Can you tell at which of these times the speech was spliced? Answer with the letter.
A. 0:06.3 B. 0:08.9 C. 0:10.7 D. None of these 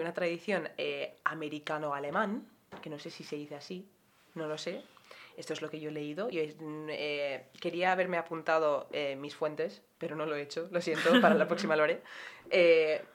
D